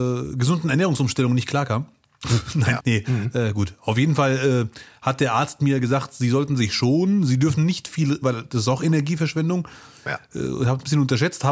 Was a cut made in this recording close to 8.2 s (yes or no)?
yes